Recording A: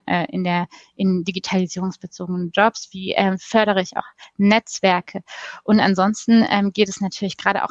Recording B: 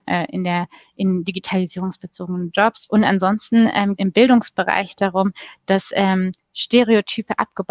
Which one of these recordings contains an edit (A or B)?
B